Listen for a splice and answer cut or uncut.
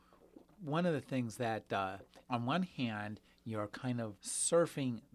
cut